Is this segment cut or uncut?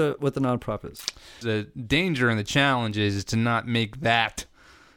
cut